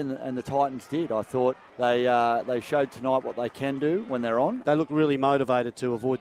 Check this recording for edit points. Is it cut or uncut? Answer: cut